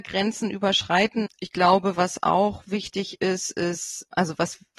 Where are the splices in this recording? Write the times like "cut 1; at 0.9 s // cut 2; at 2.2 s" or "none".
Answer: cut 1; at 1.3 s